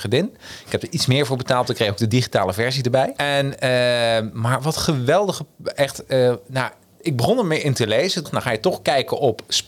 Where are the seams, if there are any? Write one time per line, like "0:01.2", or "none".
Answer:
0:03.2
0:08.3